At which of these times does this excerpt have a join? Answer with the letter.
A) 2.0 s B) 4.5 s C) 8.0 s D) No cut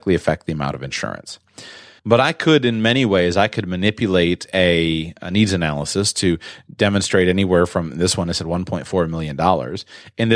A